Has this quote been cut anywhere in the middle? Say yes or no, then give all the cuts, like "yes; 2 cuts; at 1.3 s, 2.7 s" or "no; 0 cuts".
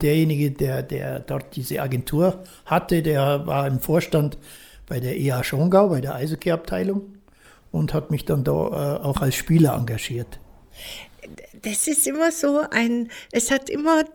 no; 0 cuts